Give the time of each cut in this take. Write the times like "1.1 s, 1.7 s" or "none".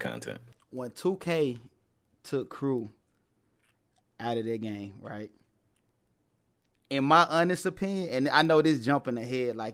none